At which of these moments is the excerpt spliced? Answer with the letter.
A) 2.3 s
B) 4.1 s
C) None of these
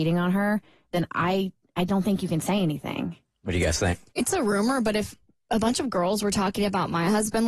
B